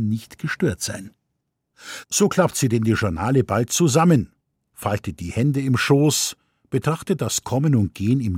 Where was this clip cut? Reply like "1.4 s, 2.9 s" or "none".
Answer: none